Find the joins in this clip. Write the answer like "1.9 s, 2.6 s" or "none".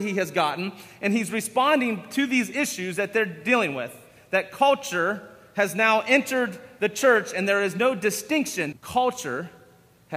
8.7 s